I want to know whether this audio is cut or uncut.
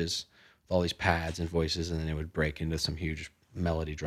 uncut